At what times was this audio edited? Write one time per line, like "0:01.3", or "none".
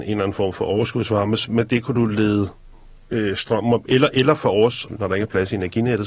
0:04.9